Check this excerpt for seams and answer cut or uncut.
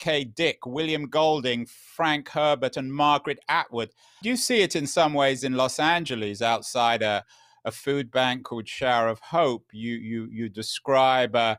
cut